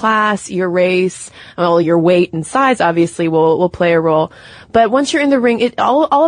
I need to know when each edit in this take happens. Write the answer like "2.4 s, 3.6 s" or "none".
none